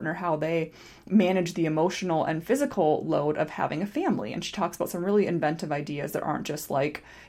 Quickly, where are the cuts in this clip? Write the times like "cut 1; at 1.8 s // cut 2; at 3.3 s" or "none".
none